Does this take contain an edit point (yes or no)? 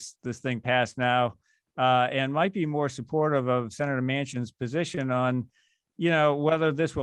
no